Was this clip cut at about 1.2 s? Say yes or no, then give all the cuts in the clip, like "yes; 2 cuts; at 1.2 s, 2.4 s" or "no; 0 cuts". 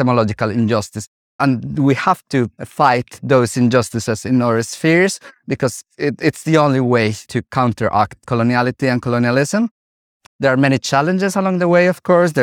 yes; 2 cuts; at 1.2 s, 10.3 s